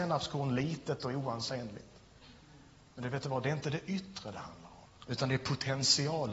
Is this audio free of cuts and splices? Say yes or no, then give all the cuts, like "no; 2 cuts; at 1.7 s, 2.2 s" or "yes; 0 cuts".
no; 1 cut; at 5.0 s